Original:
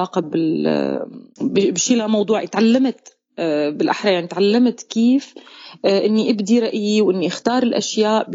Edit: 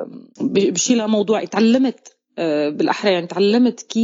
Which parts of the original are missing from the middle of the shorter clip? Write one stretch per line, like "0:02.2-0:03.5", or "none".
none